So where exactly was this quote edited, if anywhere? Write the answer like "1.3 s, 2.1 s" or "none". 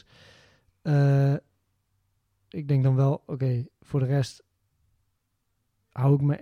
2.5 s